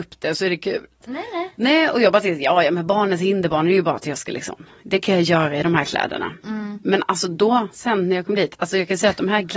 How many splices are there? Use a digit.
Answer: 1